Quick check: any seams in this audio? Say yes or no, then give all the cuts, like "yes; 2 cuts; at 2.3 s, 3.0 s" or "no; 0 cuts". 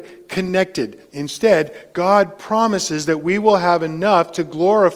yes; 1 cut; at 1.1 s